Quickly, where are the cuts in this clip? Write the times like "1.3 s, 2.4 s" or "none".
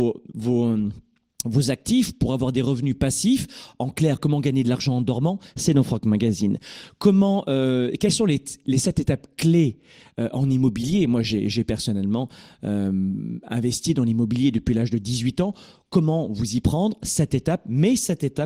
none